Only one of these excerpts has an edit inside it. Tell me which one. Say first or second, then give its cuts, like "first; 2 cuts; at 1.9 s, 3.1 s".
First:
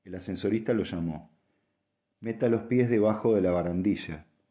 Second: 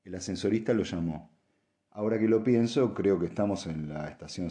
second; 1 cut; at 1.9 s